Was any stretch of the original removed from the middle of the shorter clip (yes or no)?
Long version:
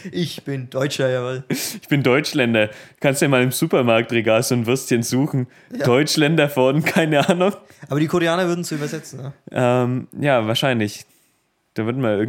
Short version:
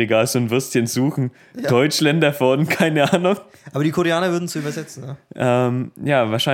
no